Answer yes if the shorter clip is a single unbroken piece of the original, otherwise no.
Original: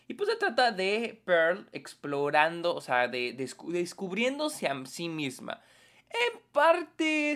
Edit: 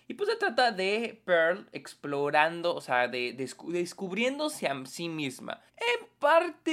no